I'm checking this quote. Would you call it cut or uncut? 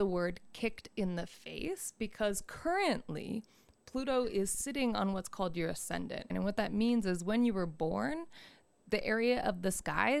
cut